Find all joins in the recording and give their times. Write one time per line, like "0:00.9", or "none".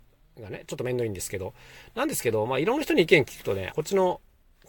0:03.7